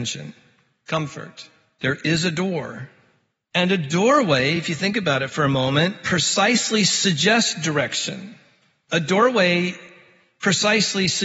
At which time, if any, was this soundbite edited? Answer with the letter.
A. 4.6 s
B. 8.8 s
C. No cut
C